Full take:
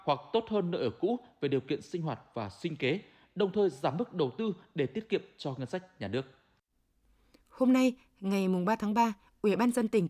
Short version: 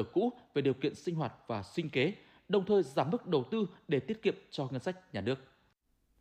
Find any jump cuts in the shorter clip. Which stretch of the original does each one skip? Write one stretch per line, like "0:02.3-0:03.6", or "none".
none